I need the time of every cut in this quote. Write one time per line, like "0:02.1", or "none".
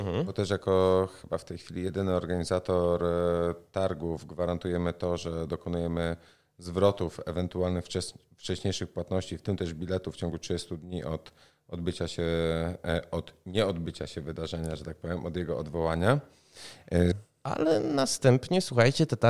0:17.1